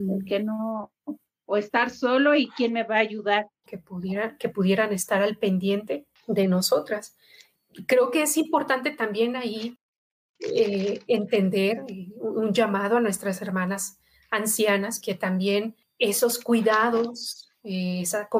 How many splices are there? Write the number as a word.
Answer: two